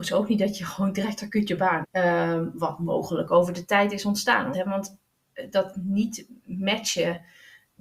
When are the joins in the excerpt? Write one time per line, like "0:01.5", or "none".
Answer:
0:01.8
0:04.5